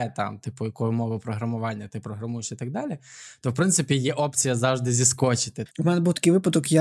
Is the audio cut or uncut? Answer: cut